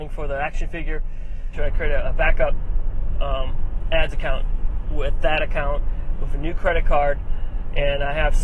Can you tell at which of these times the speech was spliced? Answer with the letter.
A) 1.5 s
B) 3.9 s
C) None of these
A